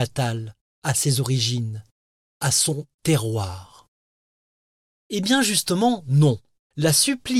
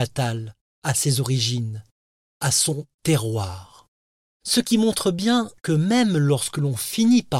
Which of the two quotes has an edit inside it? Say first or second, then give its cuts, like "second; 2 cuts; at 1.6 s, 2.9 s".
second; 1 cut; at 4.3 s